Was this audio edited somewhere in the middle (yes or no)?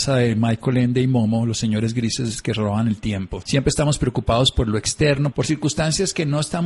yes